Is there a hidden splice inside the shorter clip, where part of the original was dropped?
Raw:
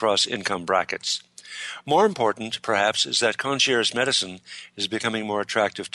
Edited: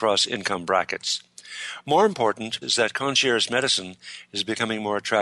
yes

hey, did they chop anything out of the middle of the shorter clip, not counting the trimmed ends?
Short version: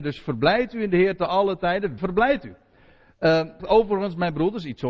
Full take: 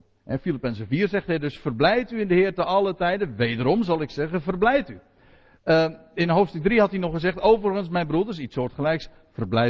yes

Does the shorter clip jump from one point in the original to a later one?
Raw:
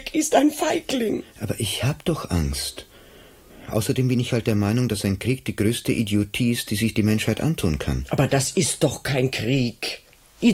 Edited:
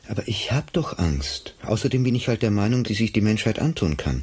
yes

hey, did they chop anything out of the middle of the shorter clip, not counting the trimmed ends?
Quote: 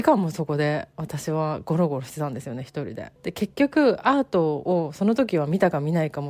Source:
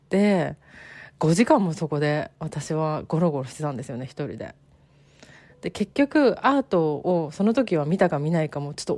yes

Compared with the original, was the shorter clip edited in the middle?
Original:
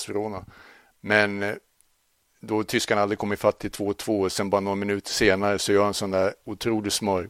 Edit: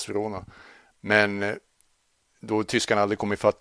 no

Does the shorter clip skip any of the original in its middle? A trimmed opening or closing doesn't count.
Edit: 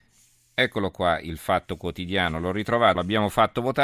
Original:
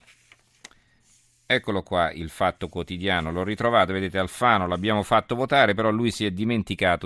yes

